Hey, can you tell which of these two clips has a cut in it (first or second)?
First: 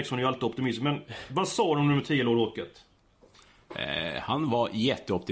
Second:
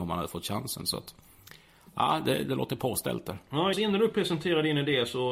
second